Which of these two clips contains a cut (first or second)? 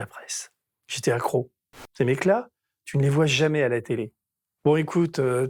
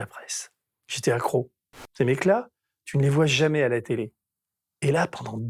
first